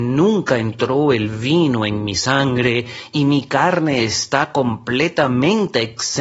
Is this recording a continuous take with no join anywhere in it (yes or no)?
yes